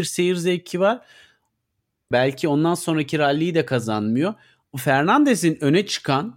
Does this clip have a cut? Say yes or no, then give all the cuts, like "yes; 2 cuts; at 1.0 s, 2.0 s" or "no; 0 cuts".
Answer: yes; 2 cuts; at 2.1 s, 4.6 s